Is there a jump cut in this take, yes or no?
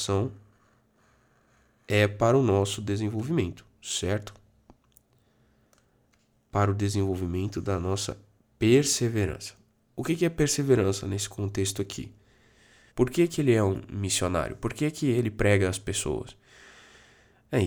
yes